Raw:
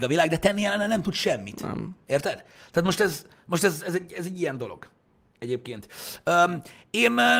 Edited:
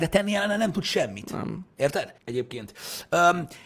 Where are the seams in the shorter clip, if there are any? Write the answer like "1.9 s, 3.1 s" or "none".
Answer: 2.2 s